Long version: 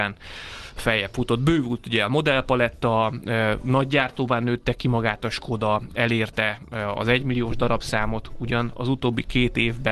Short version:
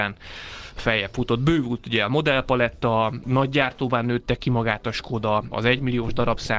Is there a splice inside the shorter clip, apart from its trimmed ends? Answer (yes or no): yes